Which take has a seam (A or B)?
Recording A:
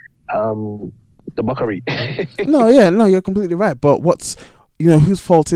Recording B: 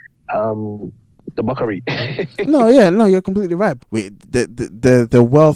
B